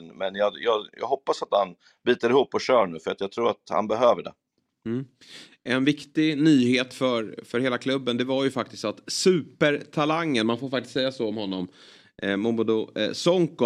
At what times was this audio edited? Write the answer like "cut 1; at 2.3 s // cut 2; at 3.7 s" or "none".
none